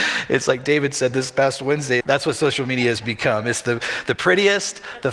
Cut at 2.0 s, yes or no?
yes